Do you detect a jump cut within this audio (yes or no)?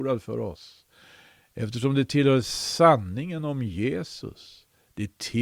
no